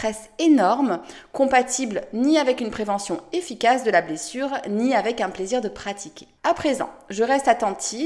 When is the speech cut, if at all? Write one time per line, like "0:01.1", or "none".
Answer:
0:06.4